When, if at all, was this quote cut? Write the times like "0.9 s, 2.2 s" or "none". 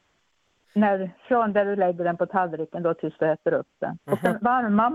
none